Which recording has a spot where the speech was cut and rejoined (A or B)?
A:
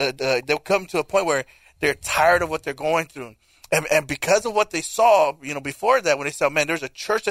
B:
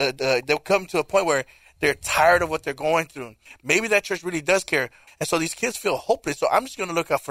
B